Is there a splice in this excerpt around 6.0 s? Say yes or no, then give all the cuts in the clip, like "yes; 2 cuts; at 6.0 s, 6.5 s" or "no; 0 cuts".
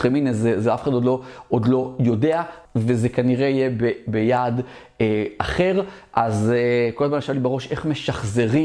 no; 1 cut; at 2.7 s